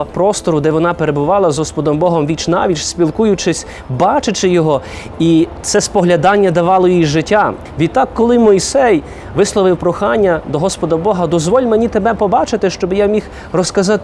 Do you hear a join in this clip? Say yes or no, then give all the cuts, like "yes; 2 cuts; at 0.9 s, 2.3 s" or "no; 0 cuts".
no; 0 cuts